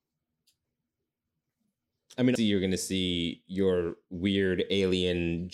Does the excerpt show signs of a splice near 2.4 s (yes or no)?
yes